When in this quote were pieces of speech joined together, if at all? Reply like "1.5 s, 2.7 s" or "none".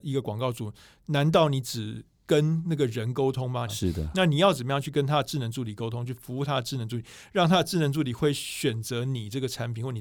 3.7 s

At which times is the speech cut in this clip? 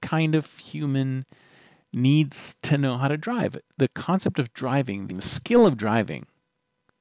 5.1 s

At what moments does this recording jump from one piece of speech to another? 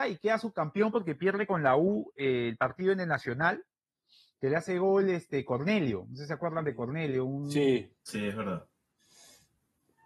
8.0 s

